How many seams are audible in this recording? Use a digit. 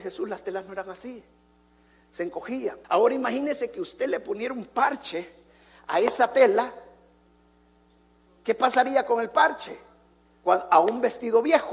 1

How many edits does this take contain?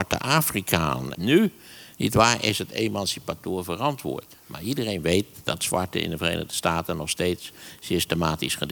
1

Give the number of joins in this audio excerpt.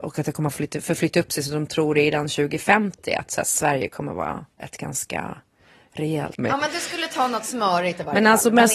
2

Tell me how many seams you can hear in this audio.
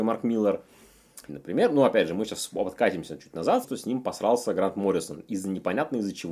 2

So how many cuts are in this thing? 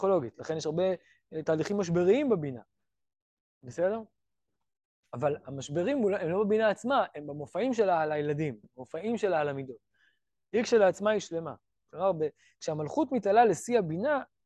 1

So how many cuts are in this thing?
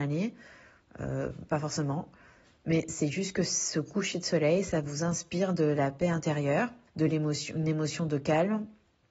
1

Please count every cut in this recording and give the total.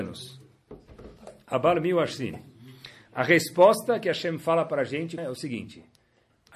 1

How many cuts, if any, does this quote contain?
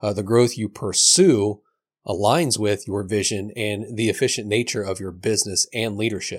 0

